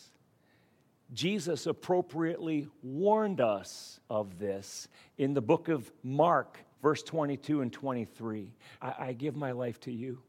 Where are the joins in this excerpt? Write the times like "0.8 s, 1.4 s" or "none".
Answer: 4.1 s, 6.7 s, 8.8 s